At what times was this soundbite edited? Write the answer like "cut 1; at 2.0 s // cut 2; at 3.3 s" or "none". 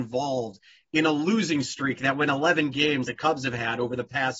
cut 1; at 3.0 s